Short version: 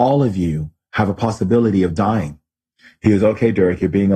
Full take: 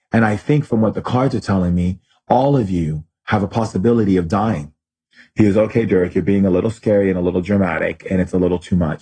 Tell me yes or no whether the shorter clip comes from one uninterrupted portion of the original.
yes